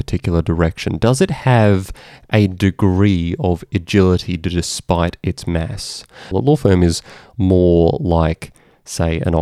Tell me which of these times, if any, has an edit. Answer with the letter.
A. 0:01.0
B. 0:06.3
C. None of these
B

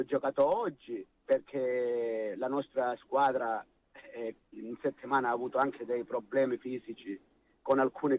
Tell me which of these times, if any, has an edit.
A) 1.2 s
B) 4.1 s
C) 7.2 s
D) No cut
A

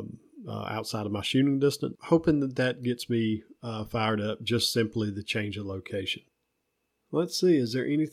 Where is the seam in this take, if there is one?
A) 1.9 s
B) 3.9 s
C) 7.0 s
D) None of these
A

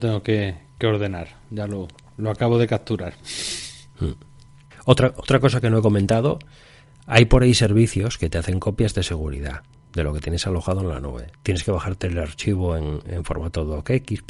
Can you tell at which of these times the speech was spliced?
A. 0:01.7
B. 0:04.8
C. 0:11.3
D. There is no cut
C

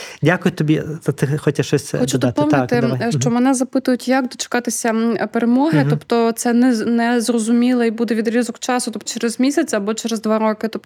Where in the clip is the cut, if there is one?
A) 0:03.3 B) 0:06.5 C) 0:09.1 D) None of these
C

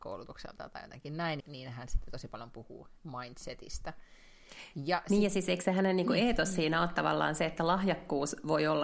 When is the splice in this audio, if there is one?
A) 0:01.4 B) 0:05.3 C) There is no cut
A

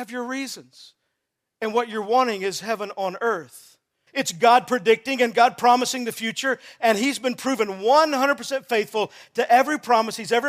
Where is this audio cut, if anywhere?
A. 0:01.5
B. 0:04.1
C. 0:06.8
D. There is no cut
B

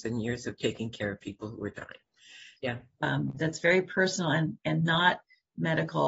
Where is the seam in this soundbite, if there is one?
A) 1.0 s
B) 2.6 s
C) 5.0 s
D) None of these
B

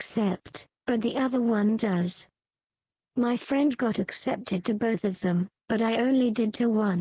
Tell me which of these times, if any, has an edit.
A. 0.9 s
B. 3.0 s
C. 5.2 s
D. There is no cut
D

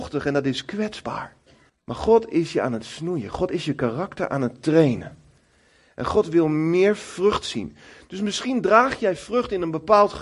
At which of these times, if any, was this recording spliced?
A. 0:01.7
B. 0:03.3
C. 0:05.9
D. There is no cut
A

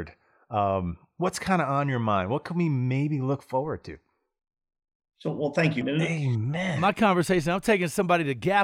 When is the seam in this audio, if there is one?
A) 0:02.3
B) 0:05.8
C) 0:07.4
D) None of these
B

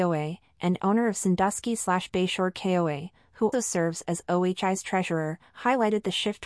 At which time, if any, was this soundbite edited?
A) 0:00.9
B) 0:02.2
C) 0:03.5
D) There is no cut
C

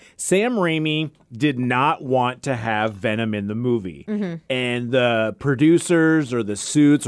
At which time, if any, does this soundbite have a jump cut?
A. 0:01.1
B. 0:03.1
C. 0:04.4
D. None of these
D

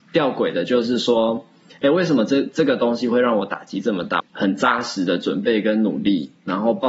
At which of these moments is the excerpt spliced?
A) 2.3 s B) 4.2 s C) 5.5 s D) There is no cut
B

